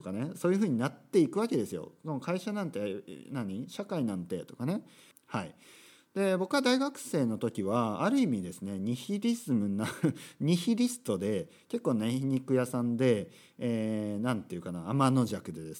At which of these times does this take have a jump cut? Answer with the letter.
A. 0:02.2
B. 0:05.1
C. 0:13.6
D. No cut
B